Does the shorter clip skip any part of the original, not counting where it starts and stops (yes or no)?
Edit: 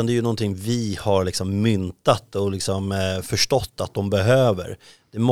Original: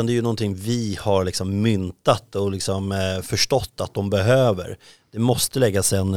no